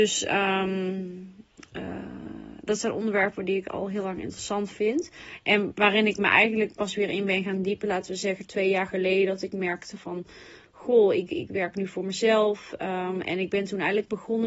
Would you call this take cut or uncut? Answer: cut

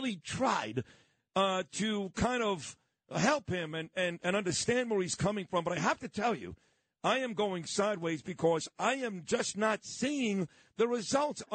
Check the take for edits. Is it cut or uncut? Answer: uncut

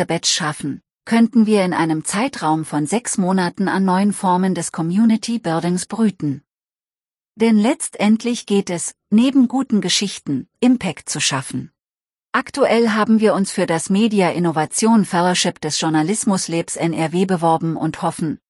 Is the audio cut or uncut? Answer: cut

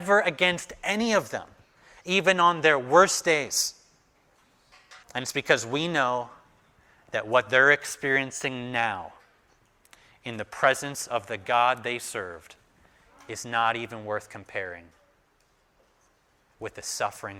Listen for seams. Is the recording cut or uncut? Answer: cut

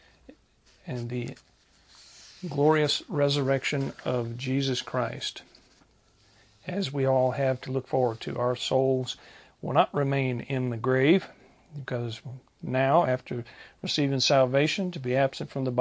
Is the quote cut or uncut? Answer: uncut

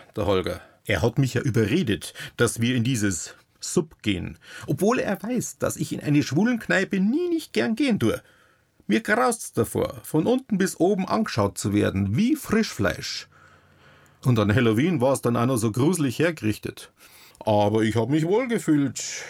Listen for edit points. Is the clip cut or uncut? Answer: cut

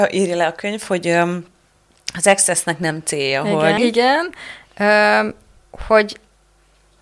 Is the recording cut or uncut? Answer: cut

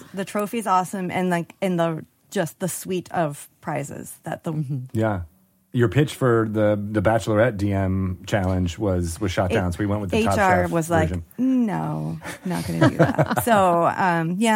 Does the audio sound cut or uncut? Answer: cut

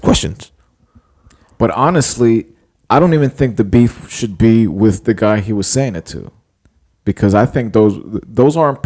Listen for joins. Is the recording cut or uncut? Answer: uncut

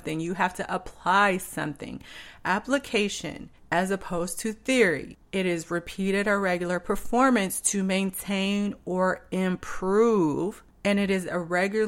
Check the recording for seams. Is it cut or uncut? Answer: uncut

